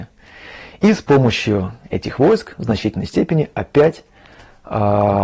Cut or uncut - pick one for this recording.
uncut